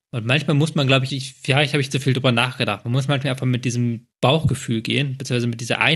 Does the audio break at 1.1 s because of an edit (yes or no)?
yes